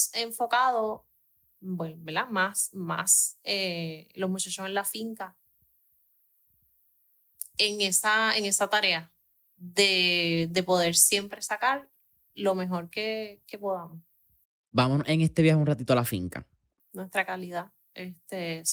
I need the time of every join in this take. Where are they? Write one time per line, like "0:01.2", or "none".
0:16.8